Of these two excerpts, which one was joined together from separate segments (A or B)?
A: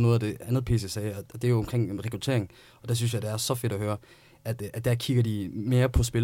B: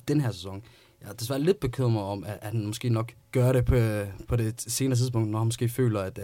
B